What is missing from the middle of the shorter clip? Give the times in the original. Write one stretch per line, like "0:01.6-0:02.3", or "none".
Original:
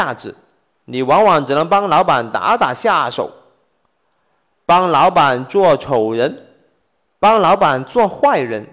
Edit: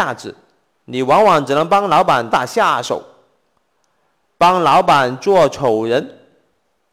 0:02.3-0:02.6